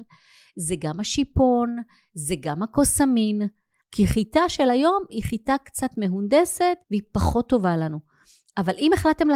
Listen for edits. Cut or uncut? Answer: cut